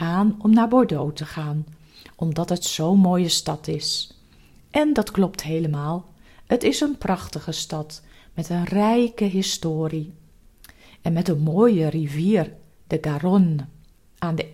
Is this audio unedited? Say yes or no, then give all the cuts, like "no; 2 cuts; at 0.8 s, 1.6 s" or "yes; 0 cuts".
yes; 0 cuts